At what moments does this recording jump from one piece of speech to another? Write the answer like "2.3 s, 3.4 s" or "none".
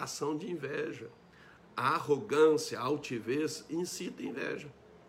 1.6 s